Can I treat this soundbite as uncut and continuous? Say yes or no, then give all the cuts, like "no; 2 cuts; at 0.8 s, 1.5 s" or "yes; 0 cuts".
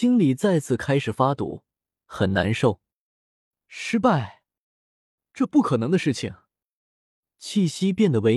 yes; 0 cuts